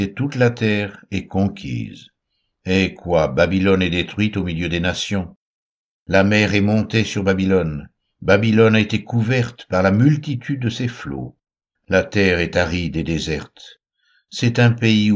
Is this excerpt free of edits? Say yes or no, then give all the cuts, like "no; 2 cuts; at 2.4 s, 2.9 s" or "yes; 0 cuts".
no; 1 cut; at 11.8 s